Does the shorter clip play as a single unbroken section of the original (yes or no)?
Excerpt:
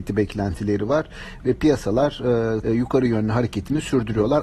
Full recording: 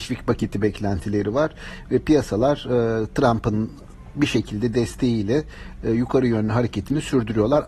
no